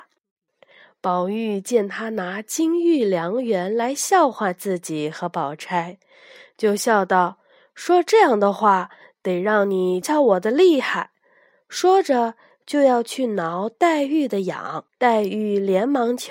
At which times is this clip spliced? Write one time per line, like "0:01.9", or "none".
0:10.0
0:14.9